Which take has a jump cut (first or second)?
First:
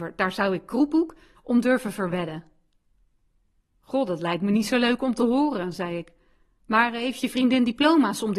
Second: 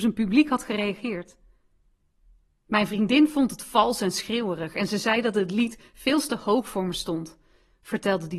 first